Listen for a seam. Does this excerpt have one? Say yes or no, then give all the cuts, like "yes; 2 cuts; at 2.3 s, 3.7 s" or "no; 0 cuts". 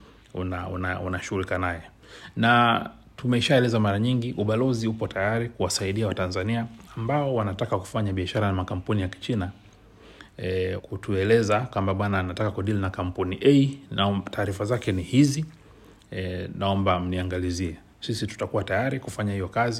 yes; 1 cut; at 10.8 s